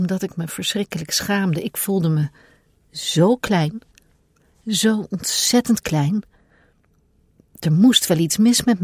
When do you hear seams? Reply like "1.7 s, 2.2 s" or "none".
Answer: none